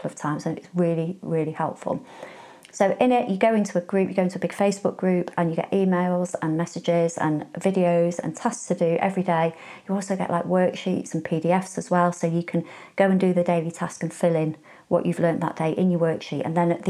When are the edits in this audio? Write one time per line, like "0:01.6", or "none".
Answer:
none

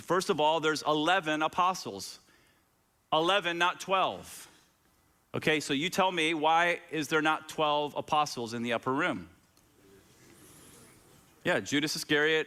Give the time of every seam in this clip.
none

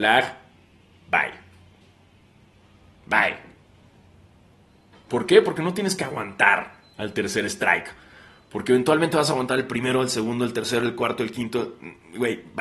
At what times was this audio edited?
none

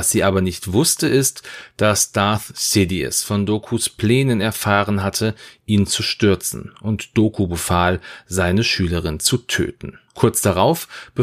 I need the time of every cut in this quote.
0:10.1

